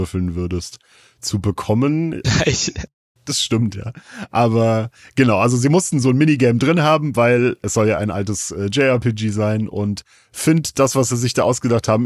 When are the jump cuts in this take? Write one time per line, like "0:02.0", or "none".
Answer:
0:02.2